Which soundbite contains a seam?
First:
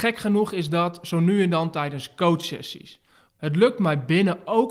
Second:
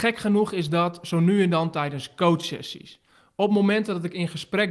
first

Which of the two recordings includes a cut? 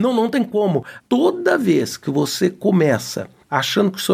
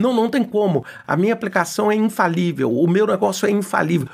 first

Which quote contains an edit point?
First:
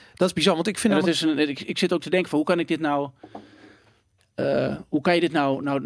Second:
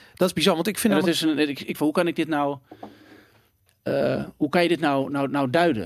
second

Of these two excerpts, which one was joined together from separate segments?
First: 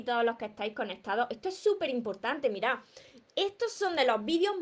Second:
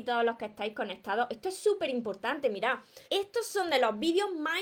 second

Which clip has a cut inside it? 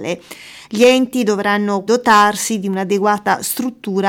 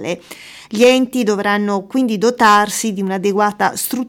first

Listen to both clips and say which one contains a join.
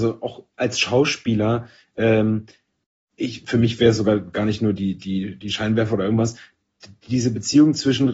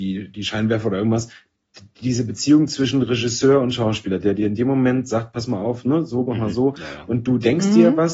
second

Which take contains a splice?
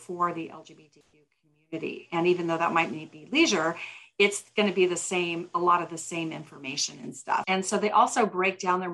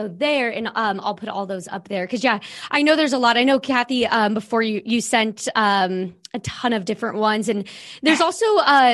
first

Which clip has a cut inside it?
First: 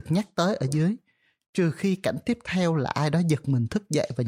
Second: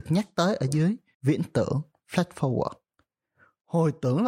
second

